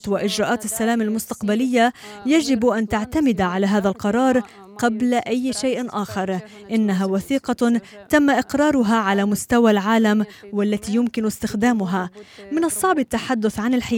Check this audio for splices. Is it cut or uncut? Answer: uncut